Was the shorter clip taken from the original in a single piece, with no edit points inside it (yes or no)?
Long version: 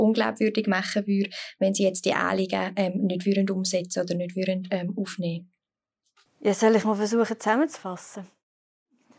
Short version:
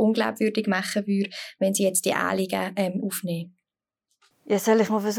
no